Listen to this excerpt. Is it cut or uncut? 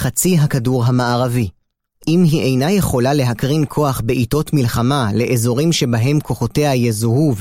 cut